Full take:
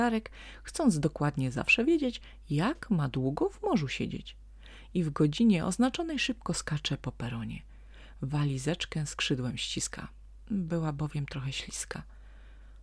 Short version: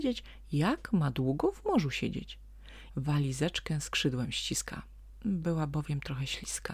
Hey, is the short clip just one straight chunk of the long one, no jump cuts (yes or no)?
no